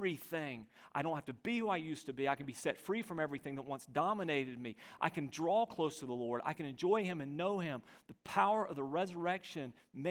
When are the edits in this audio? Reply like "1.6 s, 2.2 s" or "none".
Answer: none